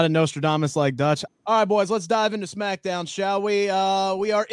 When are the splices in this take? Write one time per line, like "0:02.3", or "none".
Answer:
0:01.3